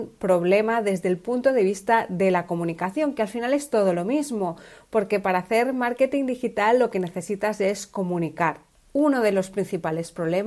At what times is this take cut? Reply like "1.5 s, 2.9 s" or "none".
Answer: 8.7 s